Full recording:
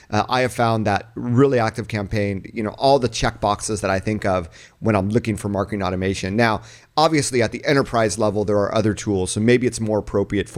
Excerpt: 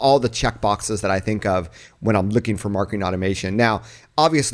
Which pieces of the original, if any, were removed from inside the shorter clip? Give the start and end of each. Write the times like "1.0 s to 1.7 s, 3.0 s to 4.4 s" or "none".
none

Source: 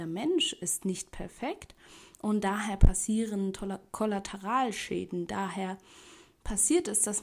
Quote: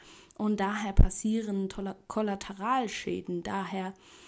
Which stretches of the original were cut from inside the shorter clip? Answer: none

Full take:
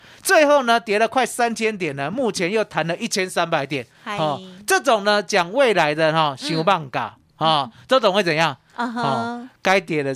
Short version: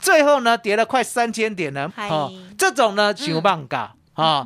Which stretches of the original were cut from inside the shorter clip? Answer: 2.1 s to 4.0 s, 5.2 s to 6.4 s

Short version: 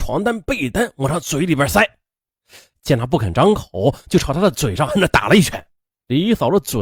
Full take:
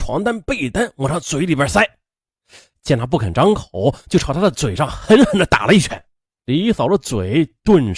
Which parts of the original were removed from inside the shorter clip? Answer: 4.9 s to 5.3 s

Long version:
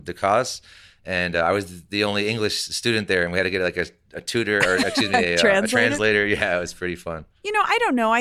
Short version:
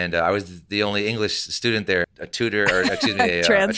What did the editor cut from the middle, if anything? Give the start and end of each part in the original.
3.2 s to 4.0 s

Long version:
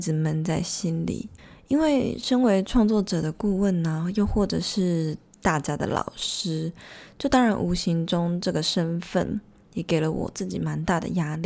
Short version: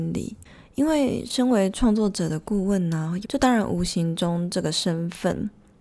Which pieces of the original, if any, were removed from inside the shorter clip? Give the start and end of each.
4.1 s to 7.1 s

